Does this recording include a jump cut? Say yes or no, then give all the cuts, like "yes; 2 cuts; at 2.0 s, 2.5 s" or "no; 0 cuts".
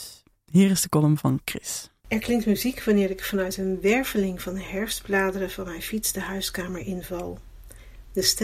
yes; 1 cut; at 2.0 s